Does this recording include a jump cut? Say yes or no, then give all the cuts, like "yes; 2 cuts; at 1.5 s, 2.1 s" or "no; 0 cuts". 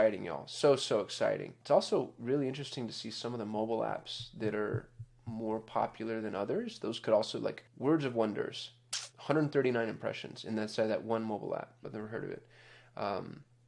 yes; 2 cuts; at 9.1 s, 11.8 s